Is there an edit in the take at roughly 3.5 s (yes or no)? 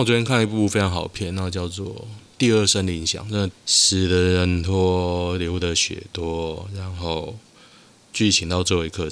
yes